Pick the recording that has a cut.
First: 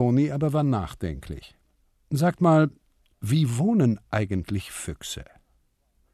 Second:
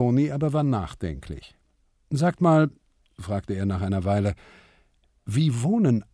first; 1 cut; at 3.1 s

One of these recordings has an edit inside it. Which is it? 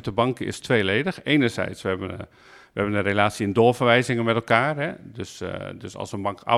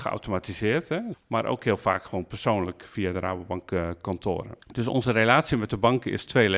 second; 2 cuts; at 1.1 s, 4.6 s

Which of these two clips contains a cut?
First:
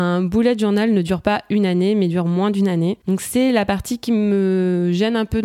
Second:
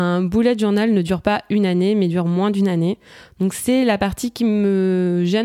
first; 1 cut; at 3.0 s

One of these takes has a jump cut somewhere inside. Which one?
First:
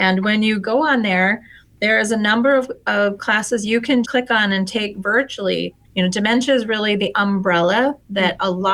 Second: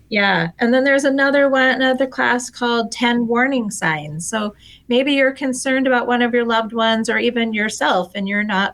first; 2 cuts; at 4.0 s, 5.8 s

